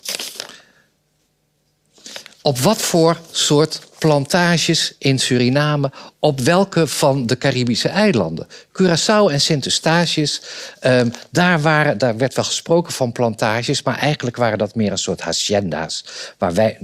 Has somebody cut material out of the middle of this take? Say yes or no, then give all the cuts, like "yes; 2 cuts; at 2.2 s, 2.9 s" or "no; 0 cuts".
no; 0 cuts